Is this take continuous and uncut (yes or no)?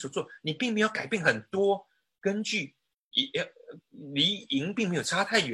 yes